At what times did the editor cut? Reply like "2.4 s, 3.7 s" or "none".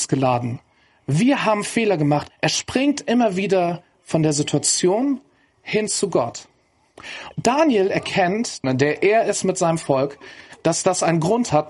2.3 s, 7.3 s, 8.6 s